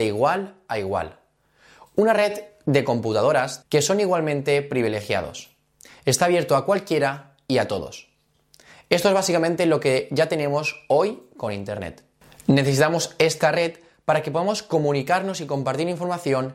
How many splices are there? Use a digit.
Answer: 1